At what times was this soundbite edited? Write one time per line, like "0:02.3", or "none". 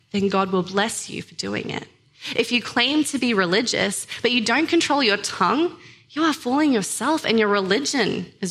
none